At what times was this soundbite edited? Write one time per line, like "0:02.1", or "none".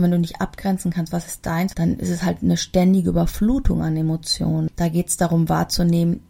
0:01.7
0:04.7